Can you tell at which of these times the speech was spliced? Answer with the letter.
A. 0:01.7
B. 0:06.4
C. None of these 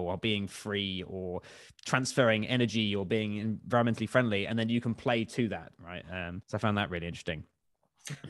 B